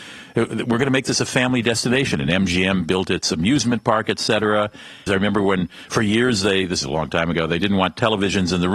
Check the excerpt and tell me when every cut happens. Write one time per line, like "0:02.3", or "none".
0:05.1